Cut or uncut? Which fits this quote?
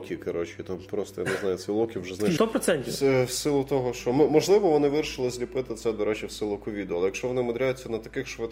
cut